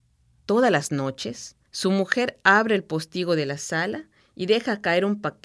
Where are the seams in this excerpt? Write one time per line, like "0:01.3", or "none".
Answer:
0:01.7